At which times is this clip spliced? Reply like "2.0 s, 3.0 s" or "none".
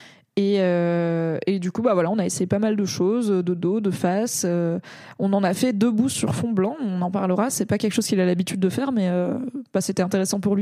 none